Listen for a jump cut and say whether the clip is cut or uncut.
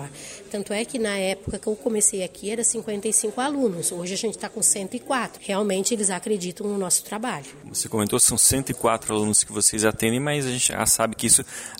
cut